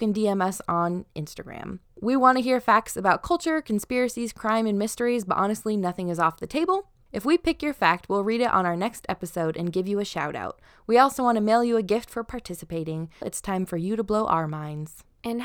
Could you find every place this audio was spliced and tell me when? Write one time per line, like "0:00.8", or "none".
0:13.2